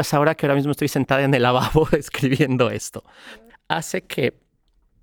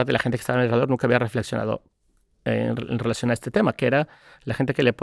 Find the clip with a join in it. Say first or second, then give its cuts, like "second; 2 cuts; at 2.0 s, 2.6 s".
first; 1 cut; at 3.5 s